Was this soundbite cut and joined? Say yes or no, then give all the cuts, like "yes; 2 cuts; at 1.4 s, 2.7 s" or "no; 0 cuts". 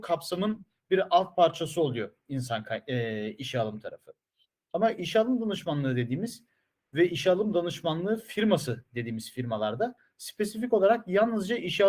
no; 0 cuts